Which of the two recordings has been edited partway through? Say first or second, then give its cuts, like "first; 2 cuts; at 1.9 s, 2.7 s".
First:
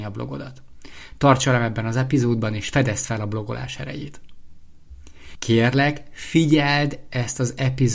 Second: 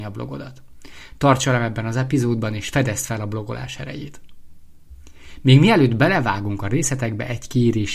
first; 1 cut; at 5.4 s